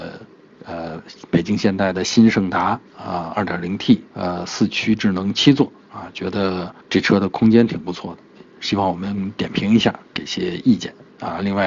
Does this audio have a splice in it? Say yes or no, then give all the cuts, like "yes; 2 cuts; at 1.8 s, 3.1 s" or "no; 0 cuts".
yes; 2 cuts; at 4.1 s, 6.8 s